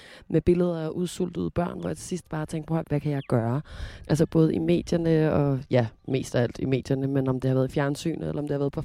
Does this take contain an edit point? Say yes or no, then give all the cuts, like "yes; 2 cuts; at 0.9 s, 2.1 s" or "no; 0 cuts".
yes; 2 cuts; at 2.8 s, 4.0 s